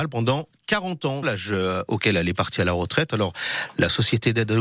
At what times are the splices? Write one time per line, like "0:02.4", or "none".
0:01.2